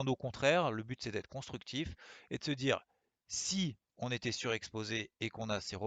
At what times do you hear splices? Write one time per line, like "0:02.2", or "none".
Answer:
none